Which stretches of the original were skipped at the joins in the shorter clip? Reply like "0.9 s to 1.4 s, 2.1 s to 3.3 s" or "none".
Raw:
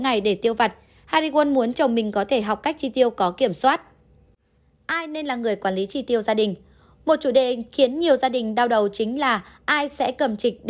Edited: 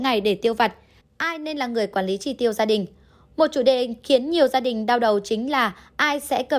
1.0 s to 4.7 s